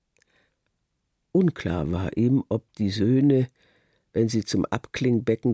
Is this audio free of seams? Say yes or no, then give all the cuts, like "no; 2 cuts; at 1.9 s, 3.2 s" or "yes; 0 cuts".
yes; 0 cuts